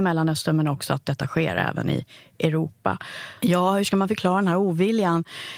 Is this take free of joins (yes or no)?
no